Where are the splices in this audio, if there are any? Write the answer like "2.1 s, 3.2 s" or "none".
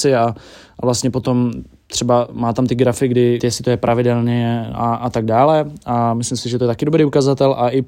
3.4 s